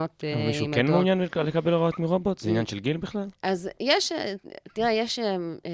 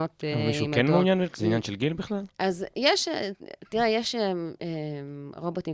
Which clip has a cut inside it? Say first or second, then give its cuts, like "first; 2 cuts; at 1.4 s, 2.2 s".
second; 1 cut; at 1.3 s